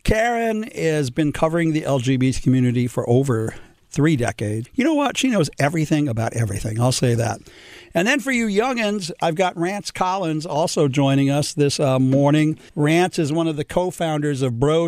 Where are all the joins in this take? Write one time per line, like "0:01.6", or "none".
0:04.7
0:12.7